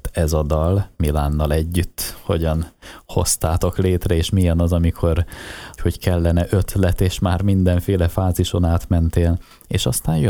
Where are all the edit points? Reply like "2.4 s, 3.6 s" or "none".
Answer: 5.8 s